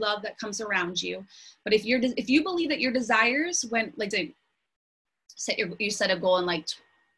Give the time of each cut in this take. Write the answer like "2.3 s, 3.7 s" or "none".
4.1 s